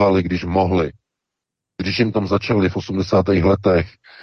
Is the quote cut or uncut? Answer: uncut